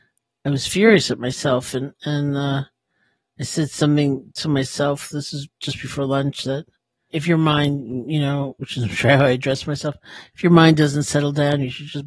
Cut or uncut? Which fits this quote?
uncut